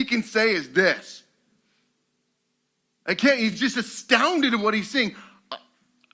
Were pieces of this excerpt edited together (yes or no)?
no